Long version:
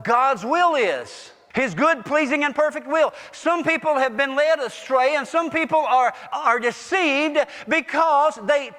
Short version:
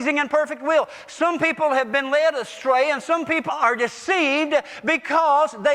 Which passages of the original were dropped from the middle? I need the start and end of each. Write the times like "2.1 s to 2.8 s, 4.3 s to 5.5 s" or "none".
5.7 s to 6.3 s

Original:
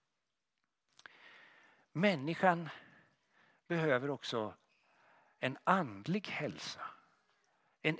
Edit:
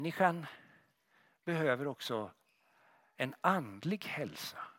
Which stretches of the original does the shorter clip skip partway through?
none

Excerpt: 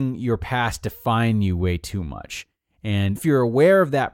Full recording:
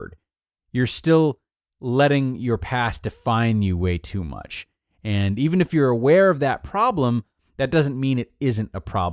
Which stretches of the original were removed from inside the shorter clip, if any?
5.4 s to 5.6 s

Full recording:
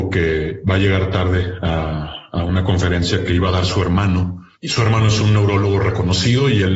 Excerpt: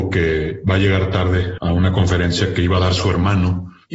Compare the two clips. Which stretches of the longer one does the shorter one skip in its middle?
1.6 s to 2.3 s

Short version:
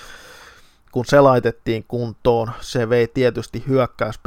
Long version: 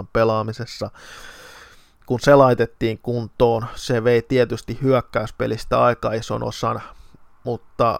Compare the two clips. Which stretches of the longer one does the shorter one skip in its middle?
none

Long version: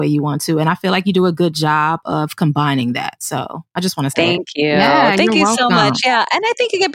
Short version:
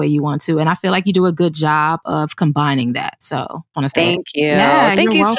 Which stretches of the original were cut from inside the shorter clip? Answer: 3.7 s to 3.9 s

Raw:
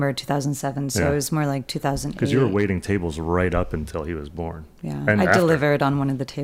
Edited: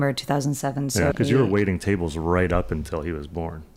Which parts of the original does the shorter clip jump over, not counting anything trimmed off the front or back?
1.1 s to 2.1 s

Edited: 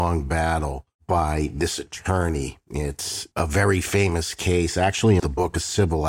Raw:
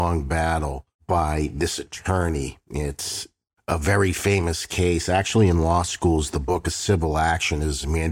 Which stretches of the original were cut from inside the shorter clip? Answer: 3.3 s to 3.6 s, 5.5 s to 6.3 s

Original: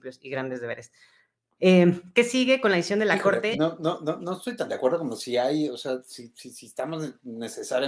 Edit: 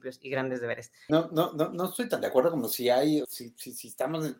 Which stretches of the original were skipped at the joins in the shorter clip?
1.1 s to 3.6 s, 5.7 s to 6.0 s

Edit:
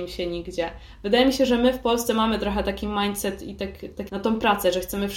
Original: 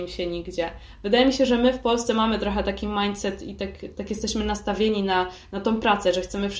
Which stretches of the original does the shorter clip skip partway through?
4.1 s to 5.5 s

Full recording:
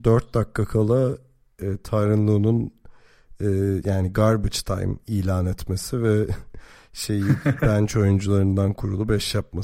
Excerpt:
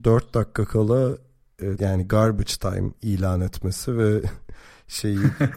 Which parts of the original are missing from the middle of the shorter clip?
1.8 s to 3.8 s

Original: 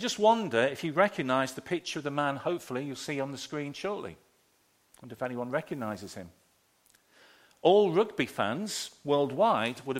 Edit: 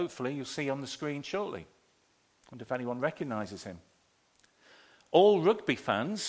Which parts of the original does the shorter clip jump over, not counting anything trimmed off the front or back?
none

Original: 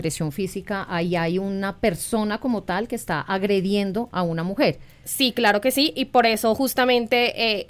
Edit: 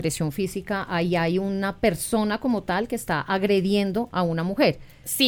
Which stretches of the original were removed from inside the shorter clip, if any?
none

